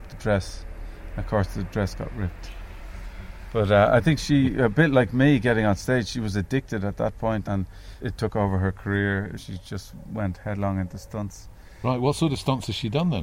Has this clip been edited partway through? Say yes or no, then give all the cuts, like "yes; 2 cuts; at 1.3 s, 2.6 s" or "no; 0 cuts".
no; 0 cuts